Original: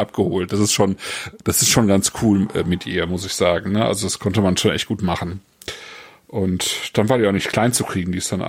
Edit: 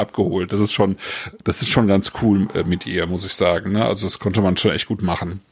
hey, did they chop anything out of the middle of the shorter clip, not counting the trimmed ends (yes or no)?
no